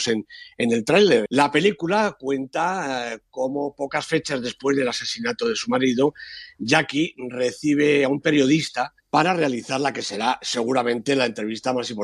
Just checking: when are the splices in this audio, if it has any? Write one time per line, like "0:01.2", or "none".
0:01.3
0:09.0

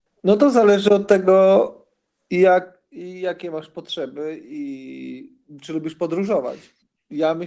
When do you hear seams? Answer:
none

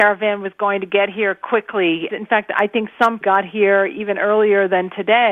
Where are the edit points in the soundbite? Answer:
0:02.1
0:03.2

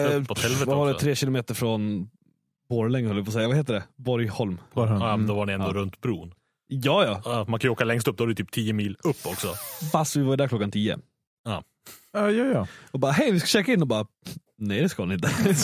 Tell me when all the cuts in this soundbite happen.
none

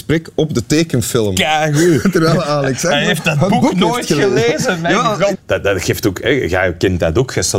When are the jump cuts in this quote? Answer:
0:05.3

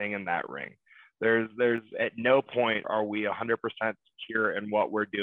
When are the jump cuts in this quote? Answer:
0:02.8

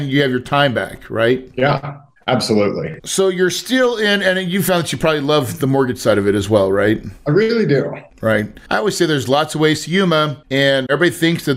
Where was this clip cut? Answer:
none

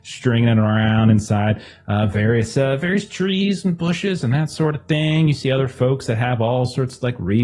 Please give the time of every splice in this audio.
none

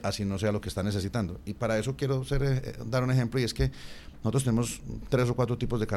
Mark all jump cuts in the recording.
none

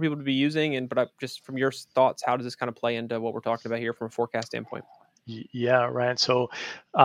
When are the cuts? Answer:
none

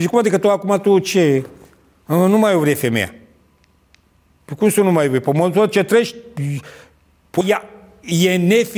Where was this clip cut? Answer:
0:07.4

